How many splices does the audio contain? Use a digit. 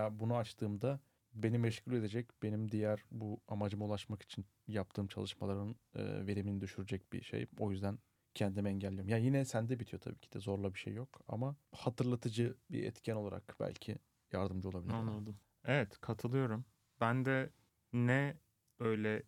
0